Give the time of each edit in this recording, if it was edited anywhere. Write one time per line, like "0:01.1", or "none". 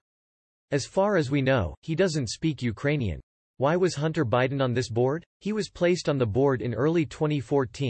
0:05.3